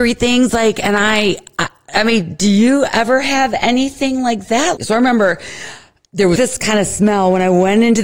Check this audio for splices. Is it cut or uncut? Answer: cut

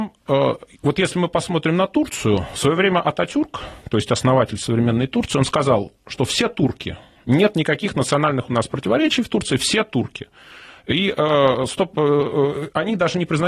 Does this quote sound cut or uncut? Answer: uncut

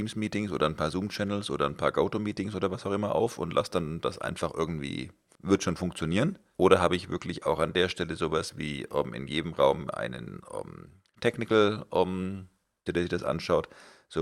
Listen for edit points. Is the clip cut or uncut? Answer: cut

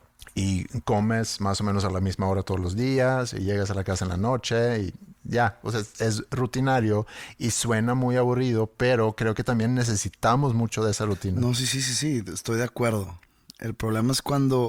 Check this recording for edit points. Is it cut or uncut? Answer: uncut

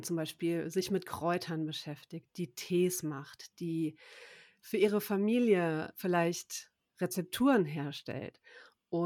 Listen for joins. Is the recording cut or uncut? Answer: uncut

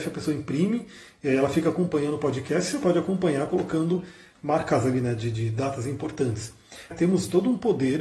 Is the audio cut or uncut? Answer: cut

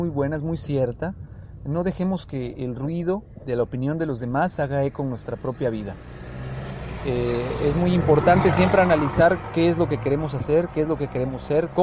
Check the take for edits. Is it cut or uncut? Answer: uncut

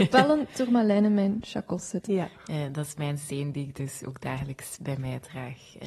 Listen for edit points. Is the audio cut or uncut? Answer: cut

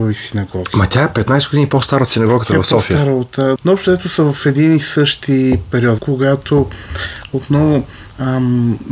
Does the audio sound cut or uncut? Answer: cut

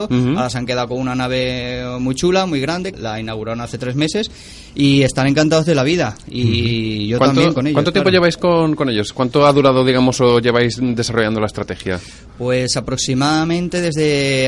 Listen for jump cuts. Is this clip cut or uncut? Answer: cut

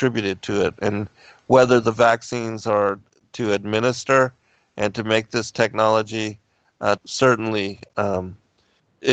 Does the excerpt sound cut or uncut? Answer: cut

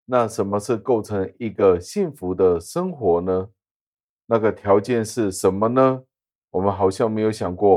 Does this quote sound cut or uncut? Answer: cut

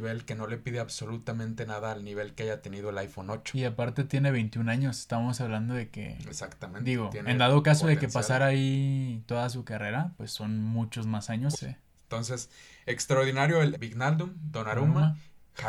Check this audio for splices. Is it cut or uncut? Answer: cut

